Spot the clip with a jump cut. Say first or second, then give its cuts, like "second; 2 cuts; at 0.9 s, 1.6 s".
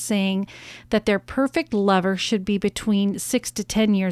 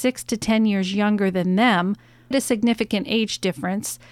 second; 1 cut; at 2.3 s